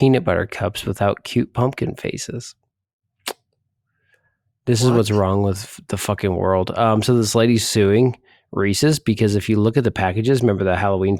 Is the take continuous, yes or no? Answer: yes